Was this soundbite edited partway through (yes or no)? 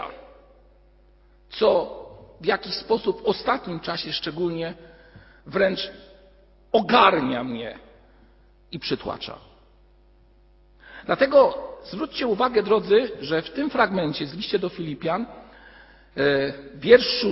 no